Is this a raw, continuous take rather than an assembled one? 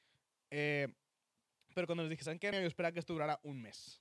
no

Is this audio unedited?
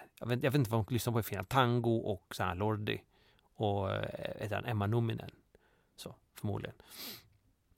yes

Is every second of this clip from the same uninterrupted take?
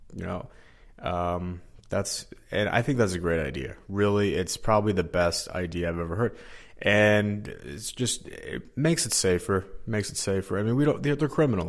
yes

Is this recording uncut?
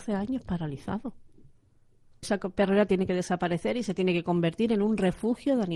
no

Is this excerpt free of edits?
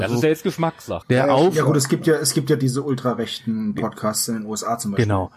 no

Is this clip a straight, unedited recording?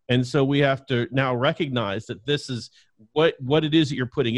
yes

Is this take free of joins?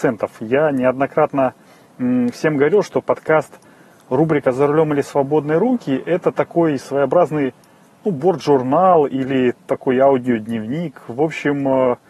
yes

